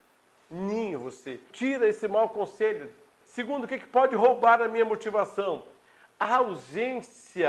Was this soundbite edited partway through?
yes; 2 cuts; at 1.5 s, 3.2 s

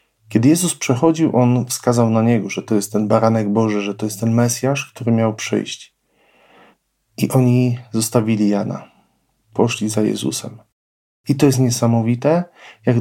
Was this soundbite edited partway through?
no; 0 cuts

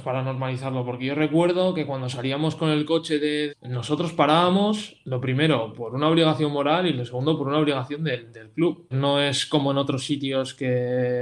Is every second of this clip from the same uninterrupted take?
no; 2 cuts; at 3.5 s, 8.9 s

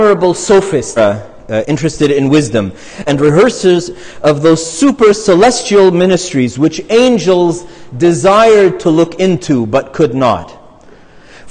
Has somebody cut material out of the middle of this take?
yes; 2 cuts; at 1.0 s, 3.1 s

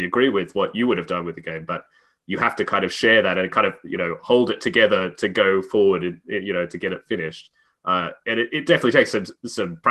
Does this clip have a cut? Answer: no; 0 cuts

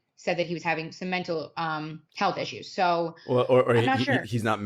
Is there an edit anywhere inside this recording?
yes; 1 cut; at 2.1 s

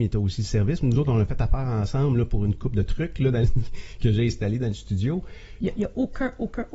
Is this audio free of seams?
no; 1 cut; at 5.6 s

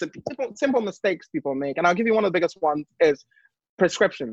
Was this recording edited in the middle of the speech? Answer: no; 0 cuts

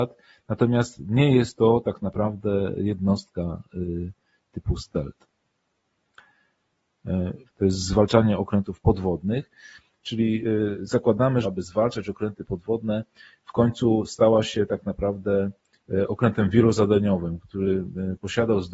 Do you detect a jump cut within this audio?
yes; 2 cuts; at 7.5 s, 11.4 s

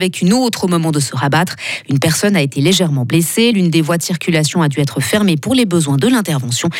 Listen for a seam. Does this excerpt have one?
no; 0 cuts

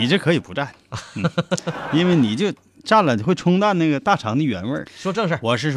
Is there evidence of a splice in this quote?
yes; 1 cut; at 4.9 s

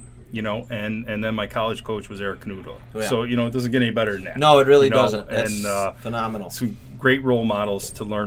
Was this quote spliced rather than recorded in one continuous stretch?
no; 0 cuts

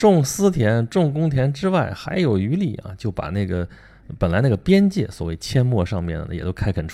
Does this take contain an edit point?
no; 0 cuts

